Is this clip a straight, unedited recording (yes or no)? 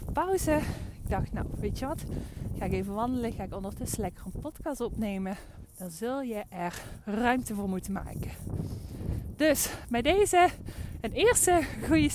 no